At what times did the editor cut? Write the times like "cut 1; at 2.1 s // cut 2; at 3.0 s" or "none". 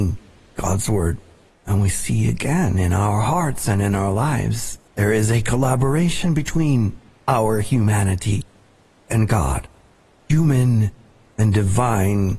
cut 1; at 1.5 s // cut 2; at 4.9 s